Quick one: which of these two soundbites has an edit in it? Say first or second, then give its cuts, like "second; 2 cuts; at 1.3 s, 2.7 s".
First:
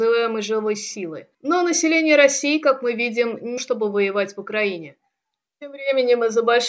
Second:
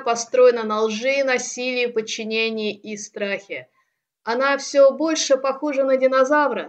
first; 3 cuts; at 1.3 s, 3.6 s, 5.5 s